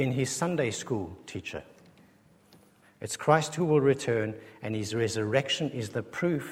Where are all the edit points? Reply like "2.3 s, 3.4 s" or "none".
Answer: 2.8 s